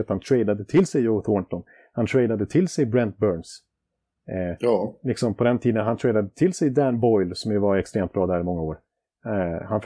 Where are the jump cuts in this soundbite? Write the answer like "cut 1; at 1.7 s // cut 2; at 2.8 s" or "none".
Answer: none